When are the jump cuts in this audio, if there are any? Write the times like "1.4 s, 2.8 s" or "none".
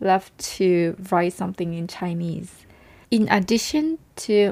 3.0 s